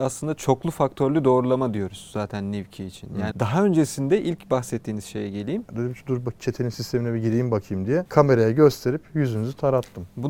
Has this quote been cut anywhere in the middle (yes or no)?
yes